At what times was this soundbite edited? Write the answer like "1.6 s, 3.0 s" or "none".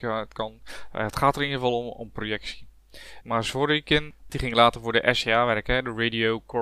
3.2 s, 4.3 s